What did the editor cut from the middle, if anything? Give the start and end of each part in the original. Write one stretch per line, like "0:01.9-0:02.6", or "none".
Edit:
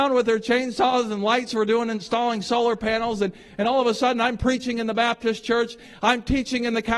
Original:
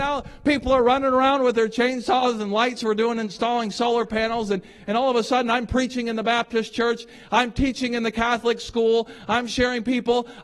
none